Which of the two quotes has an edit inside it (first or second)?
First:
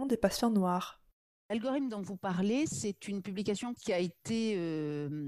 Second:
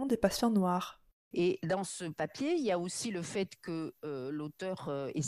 second